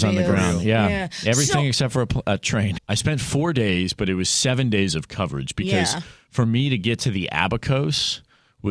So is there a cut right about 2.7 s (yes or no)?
yes